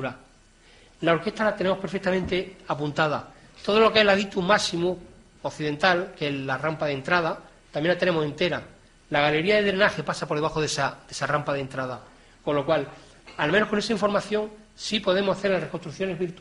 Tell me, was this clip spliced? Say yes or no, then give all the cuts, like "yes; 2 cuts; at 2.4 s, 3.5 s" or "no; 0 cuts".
no; 0 cuts